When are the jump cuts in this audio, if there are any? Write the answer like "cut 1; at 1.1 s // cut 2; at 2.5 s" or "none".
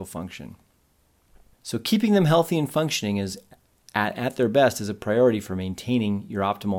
cut 1; at 1.5 s